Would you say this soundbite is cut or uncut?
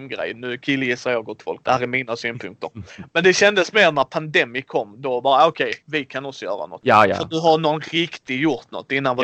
uncut